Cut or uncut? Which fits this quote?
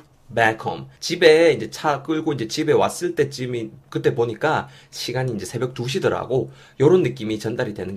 cut